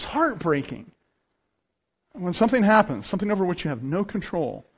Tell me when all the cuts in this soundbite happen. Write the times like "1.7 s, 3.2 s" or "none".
none